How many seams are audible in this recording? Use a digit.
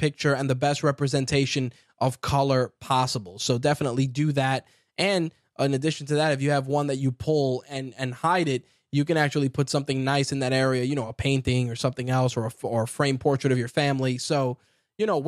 0